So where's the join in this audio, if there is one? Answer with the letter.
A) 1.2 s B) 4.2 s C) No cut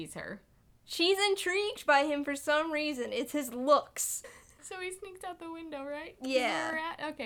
B